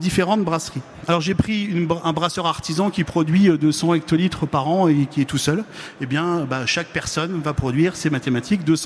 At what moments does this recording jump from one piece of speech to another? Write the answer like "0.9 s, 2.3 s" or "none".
none